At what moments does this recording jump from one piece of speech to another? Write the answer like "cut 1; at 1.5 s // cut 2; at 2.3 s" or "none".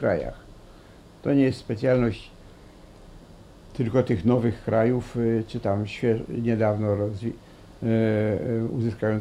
none

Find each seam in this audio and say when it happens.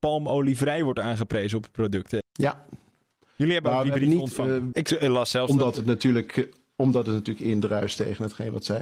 cut 1; at 2.2 s // cut 2; at 4.7 s

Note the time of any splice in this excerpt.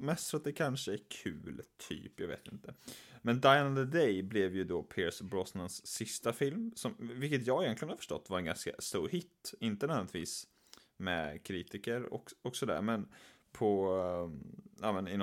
none

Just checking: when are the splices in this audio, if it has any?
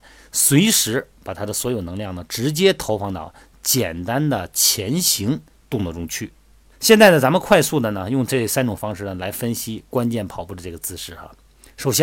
cut 1; at 6.7 s

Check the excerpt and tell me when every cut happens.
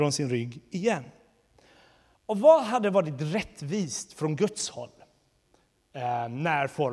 cut 1; at 2.1 s

